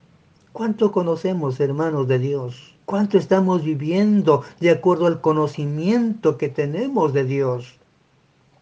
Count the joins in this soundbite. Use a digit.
1